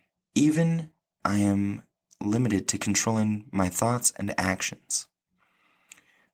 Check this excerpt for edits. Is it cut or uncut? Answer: cut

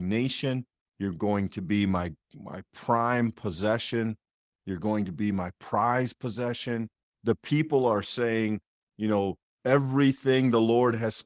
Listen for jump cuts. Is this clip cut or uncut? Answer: uncut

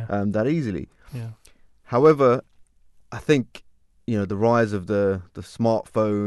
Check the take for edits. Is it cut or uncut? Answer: uncut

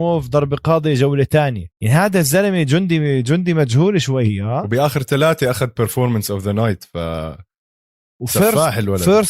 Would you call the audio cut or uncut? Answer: cut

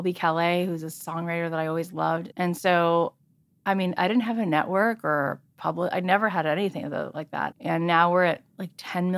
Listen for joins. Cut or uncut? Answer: cut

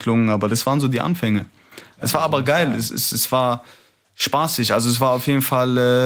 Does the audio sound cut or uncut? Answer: uncut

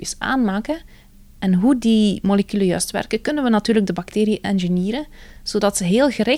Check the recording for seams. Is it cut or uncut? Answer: uncut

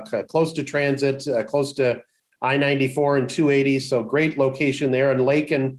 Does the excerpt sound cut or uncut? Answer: uncut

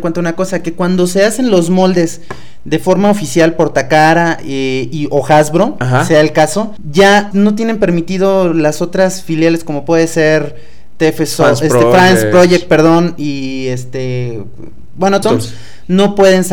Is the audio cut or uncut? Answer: cut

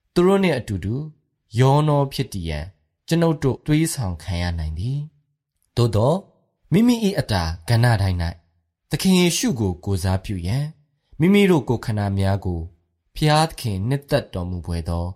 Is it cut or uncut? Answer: cut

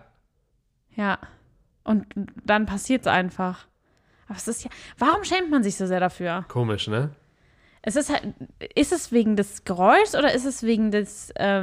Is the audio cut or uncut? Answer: uncut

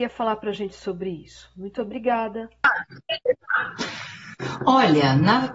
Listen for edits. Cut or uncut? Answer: uncut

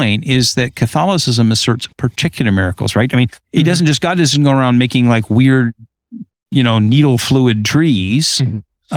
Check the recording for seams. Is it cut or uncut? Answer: uncut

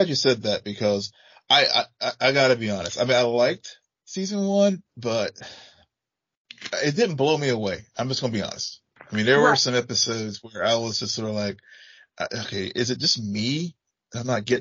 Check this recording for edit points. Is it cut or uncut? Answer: cut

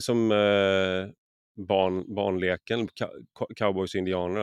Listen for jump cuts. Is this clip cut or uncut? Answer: uncut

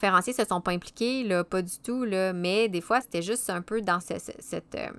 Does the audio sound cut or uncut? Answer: cut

